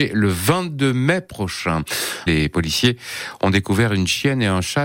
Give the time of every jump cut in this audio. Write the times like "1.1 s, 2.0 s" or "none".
2.3 s